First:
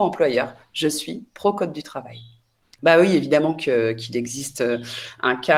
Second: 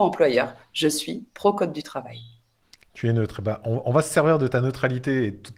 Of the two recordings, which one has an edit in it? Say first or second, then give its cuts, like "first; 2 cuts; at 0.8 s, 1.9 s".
first; 1 cut; at 2.8 s